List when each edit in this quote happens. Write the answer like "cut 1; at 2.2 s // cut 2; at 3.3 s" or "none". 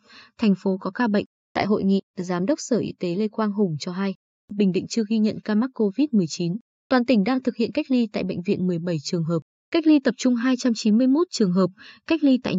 cut 1; at 1.4 s